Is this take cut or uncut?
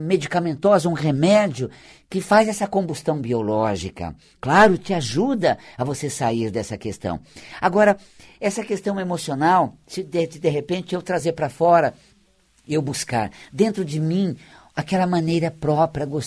uncut